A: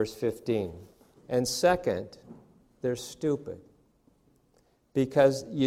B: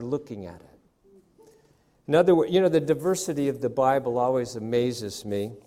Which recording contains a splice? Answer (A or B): A